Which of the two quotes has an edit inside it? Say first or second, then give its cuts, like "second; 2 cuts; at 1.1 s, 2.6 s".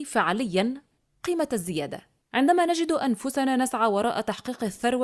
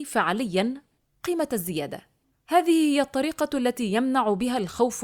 first; 1 cut; at 2.2 s